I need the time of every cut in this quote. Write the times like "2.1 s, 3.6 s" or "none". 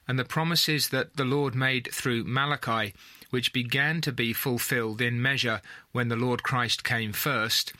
none